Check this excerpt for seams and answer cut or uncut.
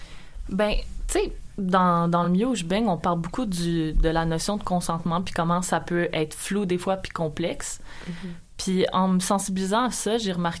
uncut